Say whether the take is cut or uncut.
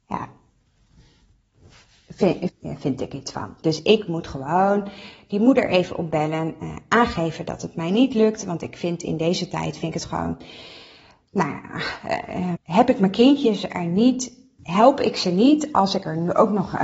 cut